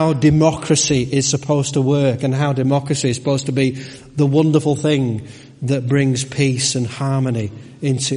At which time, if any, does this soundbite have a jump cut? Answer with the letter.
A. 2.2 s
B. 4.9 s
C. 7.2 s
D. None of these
D